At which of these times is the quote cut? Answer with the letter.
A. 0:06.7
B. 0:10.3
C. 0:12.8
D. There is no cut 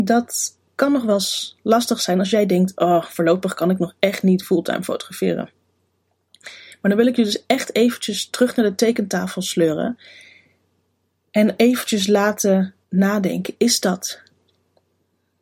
C